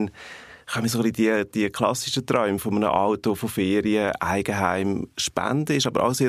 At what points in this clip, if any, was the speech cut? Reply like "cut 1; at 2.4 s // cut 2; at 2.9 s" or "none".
none